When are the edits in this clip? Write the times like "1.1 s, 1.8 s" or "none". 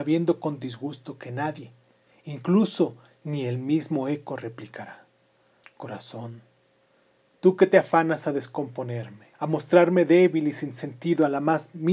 5.6 s, 9.3 s